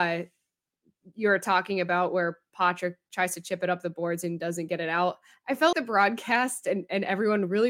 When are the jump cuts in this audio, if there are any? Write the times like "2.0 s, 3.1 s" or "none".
5.7 s